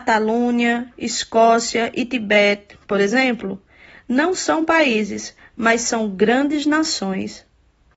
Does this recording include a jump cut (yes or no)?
no